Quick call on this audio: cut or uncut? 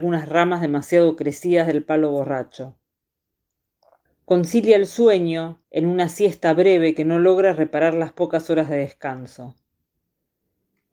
cut